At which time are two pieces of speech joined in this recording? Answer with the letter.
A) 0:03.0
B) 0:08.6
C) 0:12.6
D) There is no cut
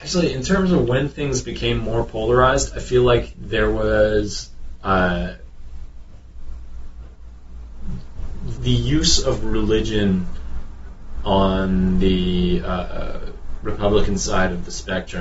B